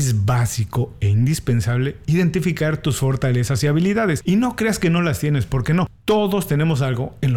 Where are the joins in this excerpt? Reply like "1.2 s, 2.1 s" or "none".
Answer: none